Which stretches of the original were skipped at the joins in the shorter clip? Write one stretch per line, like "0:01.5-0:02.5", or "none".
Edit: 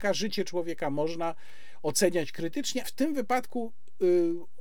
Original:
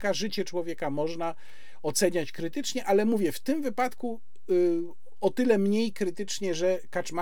0:02.8-0:03.3